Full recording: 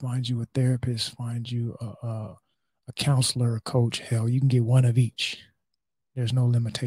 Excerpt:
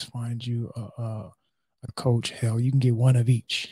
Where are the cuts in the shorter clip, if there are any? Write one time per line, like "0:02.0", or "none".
0:01.9